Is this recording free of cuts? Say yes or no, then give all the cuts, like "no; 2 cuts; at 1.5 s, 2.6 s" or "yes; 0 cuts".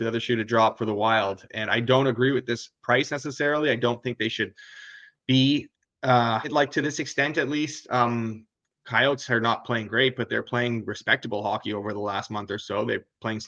no; 1 cut; at 6.4 s